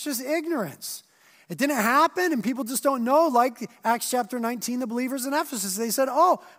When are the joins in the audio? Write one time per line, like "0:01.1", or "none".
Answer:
none